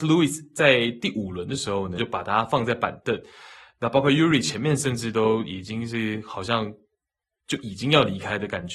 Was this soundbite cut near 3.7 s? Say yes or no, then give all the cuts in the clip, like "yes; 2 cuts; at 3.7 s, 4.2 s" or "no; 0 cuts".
no; 1 cut; at 2.0 s